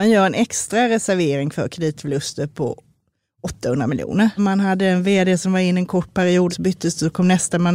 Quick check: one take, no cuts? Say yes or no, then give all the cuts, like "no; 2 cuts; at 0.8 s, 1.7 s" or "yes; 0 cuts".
no; 2 cuts; at 4.4 s, 6.5 s